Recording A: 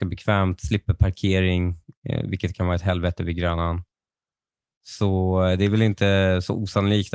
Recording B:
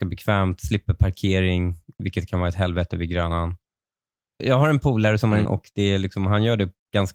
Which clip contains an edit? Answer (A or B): B